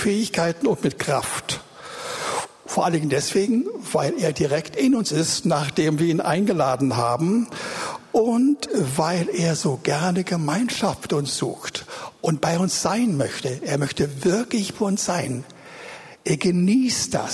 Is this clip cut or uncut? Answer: uncut